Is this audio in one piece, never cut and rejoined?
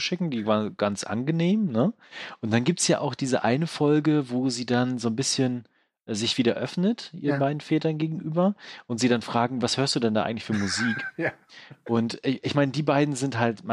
yes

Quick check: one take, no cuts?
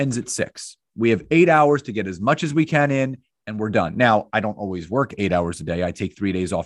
yes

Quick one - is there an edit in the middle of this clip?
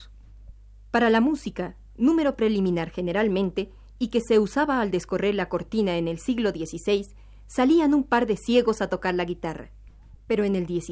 no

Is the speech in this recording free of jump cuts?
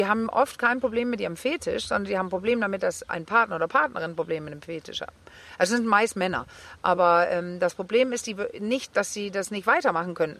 yes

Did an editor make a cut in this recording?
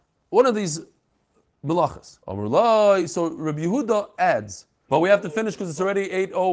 yes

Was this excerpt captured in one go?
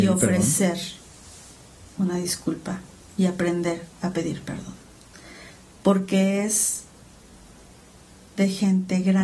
yes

